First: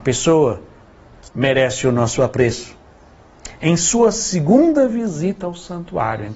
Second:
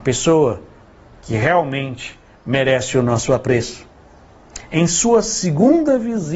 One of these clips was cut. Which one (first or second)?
first